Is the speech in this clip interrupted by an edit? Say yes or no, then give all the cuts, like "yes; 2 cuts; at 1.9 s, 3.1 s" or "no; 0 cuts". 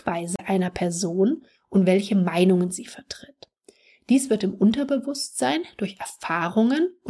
no; 0 cuts